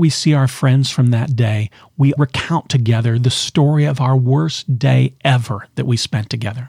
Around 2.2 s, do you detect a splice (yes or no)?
yes